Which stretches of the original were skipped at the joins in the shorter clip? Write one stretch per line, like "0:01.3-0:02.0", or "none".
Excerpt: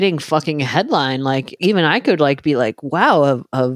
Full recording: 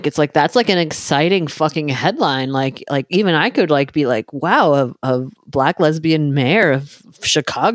0:02.9-0:03.1

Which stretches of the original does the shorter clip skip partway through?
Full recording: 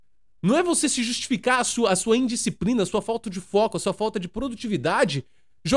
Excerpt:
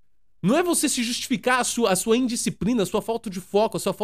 none

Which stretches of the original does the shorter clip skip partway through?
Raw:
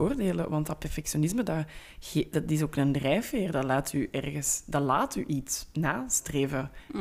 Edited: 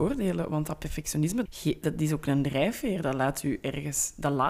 0:01.5-0:02.0

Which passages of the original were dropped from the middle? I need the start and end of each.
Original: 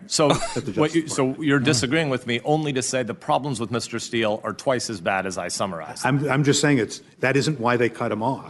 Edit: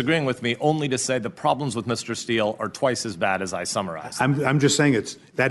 none

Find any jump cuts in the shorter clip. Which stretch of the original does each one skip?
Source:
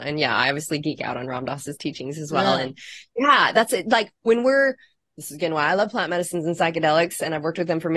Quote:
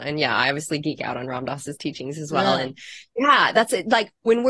none

